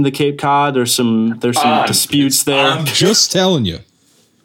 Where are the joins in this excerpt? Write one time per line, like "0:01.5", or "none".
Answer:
0:02.8

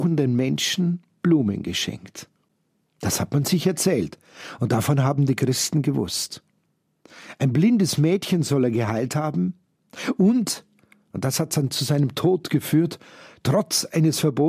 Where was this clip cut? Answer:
none

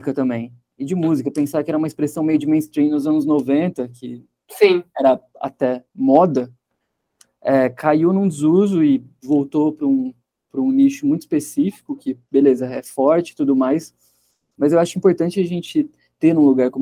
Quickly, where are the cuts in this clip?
none

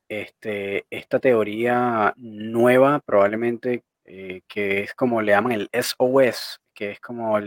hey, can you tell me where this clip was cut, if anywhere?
0:03.9

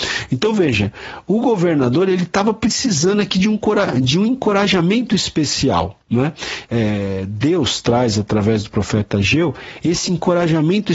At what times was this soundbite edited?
0:06.6

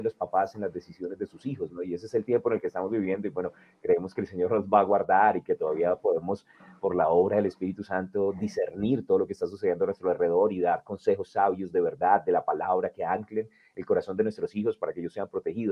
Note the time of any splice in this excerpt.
none

